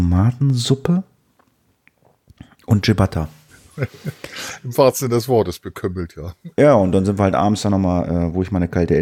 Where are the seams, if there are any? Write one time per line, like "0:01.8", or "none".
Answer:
0:03.5